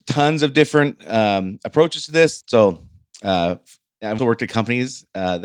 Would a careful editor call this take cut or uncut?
cut